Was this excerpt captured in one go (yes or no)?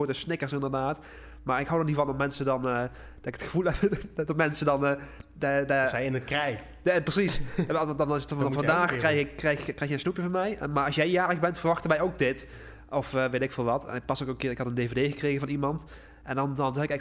yes